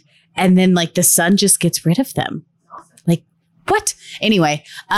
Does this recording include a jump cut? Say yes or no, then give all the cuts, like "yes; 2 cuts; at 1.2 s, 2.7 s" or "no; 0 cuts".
no; 0 cuts